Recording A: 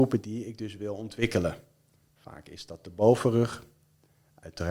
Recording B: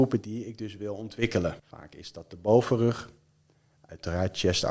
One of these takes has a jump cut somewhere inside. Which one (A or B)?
B